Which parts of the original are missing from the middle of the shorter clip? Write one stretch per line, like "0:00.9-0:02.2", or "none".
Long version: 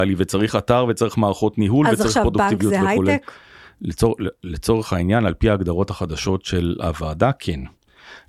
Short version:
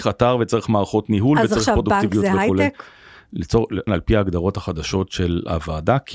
0:04.4-0:05.2

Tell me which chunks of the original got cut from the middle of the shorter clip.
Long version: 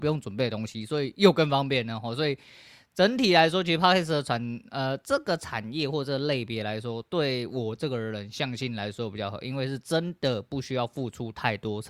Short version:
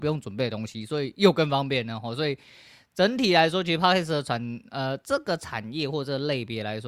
none

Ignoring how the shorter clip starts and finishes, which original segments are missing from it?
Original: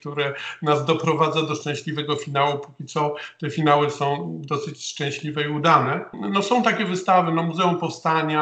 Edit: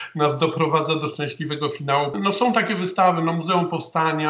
0:02.6-0:06.2

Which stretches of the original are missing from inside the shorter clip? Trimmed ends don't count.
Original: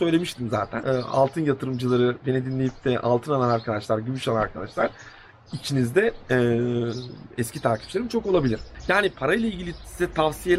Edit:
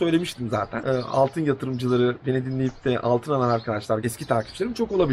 0:04.0-0:07.4

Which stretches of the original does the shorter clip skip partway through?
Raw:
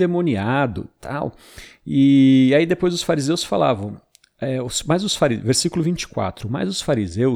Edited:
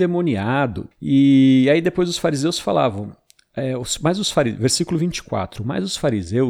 0:00.9-0:01.8

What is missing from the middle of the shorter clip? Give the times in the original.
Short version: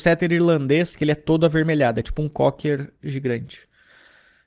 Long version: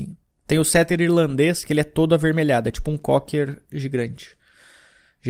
none

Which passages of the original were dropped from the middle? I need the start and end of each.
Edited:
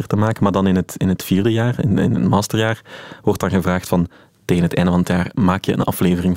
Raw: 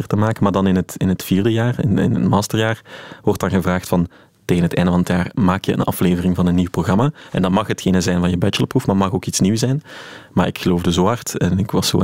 none

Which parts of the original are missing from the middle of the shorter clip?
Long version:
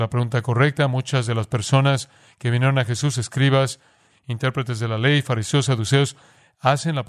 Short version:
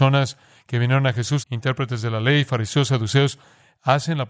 0:03.1-0:04.2

